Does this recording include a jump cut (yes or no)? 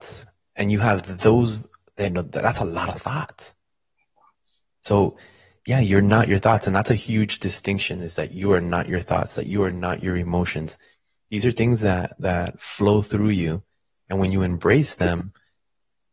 no